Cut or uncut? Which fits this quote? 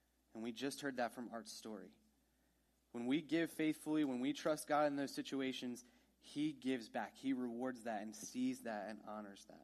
uncut